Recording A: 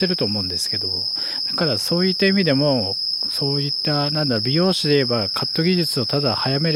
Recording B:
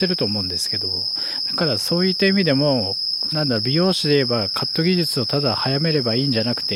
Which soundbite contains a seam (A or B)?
B